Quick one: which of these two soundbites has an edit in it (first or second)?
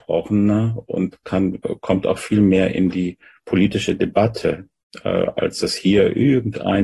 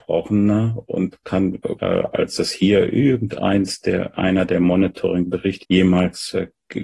second